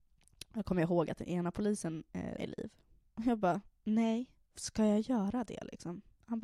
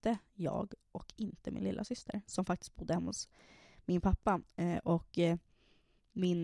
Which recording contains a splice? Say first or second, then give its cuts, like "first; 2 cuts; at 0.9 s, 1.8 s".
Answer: first; 1 cut; at 2.4 s